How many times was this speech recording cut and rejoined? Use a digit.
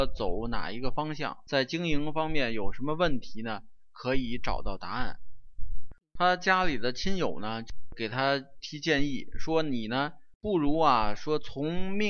3